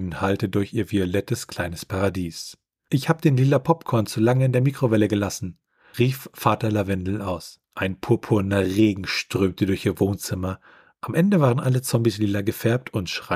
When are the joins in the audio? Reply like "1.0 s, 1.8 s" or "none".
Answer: 7.6 s